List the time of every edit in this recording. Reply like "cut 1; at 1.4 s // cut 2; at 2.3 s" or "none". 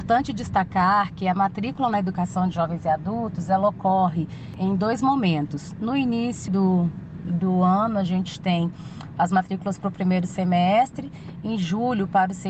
cut 1; at 6.5 s